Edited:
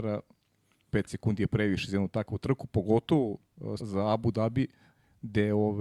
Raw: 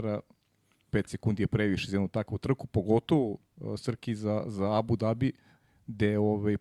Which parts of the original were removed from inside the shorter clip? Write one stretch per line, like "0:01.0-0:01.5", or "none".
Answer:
0:03.8-0:04.4

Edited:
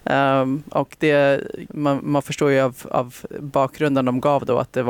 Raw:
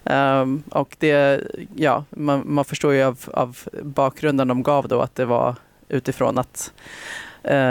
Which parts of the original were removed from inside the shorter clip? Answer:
0:01.7-0:02.1

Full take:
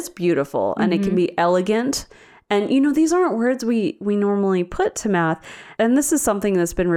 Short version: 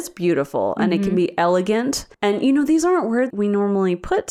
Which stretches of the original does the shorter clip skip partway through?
0:02.1-0:02.4
0:03.6-0:04.0

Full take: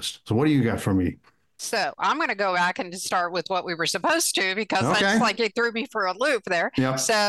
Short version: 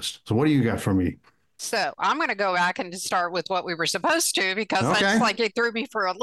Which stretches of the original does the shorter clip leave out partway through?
none

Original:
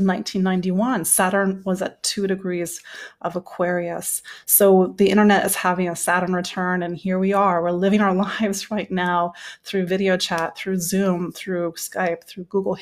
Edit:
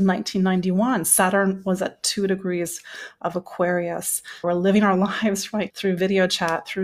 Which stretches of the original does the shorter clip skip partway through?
0:04.4-0:07.6
0:08.9-0:09.6

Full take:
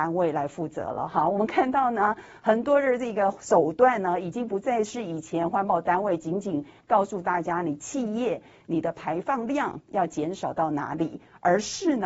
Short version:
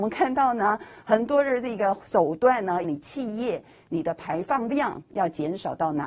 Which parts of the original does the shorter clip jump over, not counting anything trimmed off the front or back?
0:04.2-0:07.6

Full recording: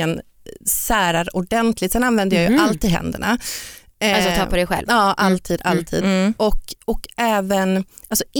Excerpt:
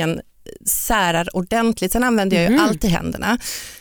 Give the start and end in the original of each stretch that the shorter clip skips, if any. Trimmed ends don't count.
none

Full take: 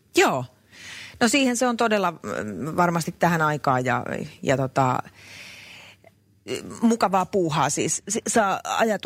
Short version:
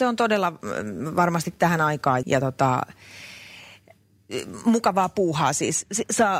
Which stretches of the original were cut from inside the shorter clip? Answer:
0:03.8-0:04.4

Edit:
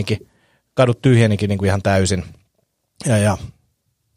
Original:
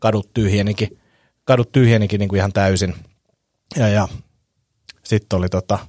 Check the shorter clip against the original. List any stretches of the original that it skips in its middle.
none

